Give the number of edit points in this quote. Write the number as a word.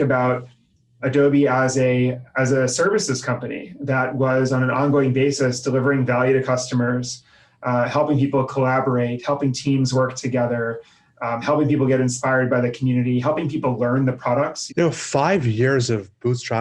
one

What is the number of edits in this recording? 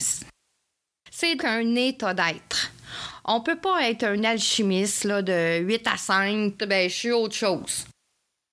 two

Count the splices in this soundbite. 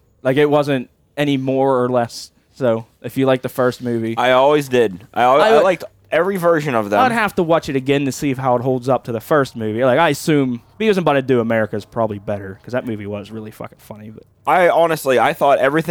zero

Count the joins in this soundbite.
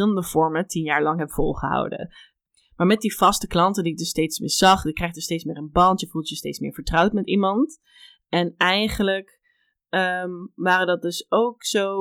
zero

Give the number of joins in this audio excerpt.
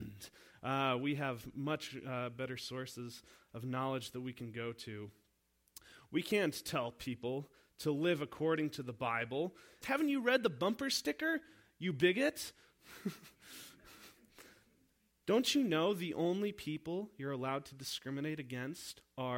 one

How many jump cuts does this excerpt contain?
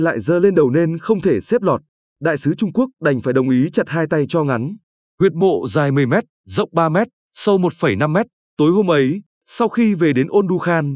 one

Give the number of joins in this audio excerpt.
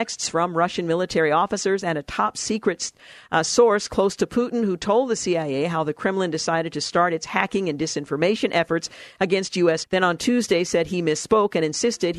one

